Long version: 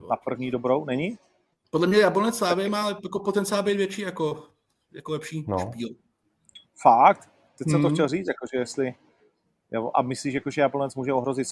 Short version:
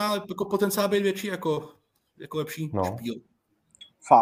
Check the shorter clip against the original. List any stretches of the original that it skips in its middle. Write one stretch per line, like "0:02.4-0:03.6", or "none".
none